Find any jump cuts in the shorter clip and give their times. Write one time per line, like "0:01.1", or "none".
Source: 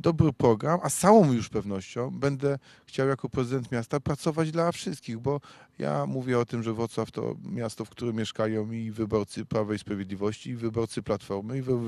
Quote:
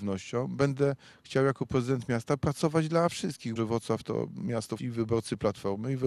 0:03.6
0:04.8